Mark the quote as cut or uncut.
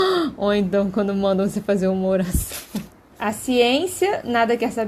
cut